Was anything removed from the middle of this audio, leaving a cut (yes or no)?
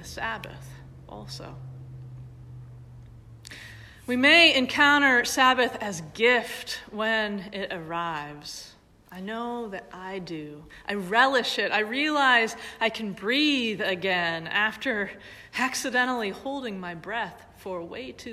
no